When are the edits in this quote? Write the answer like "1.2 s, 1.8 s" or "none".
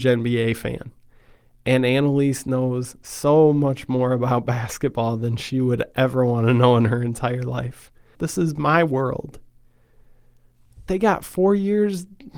8.1 s, 10.9 s